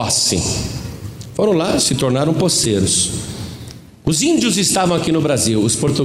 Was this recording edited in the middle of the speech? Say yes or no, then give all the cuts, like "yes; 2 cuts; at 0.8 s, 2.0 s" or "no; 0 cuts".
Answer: no; 0 cuts